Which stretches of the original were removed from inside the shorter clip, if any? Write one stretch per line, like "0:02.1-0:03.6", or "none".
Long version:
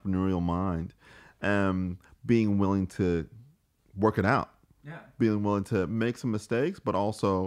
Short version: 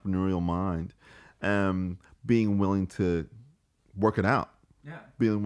none